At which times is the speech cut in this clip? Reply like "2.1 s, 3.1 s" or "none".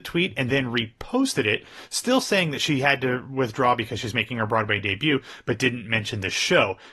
none